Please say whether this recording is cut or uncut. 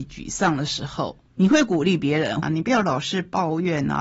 cut